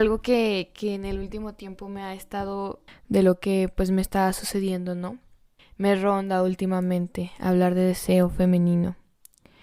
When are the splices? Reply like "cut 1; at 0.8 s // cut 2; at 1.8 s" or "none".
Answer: cut 1; at 2.9 s // cut 2; at 5.6 s